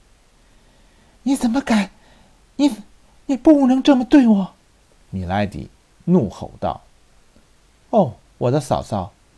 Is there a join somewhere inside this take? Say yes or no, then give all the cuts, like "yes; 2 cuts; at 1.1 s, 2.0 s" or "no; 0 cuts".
yes; 1 cut; at 3.2 s